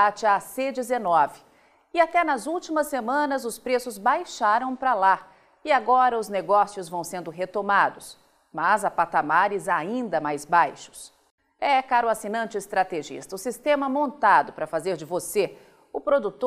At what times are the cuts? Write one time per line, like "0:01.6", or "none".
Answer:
none